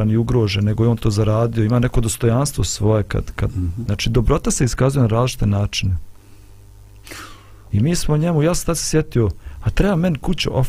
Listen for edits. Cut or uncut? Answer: cut